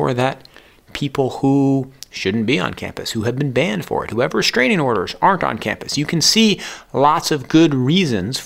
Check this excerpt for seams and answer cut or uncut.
uncut